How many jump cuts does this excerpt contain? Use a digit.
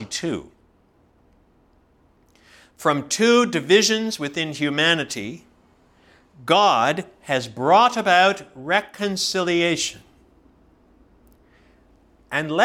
0